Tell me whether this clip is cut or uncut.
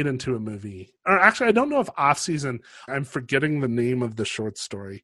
cut